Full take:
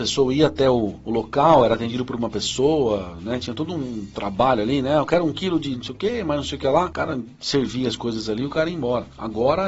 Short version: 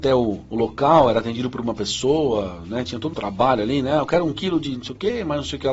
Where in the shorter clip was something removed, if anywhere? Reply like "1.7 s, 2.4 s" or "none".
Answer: 3.1 s